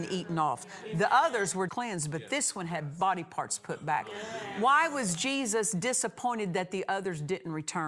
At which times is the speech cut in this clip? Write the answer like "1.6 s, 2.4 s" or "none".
1.7 s